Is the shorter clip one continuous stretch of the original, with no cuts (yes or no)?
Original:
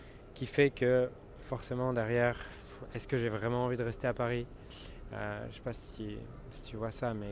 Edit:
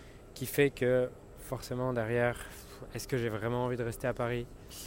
yes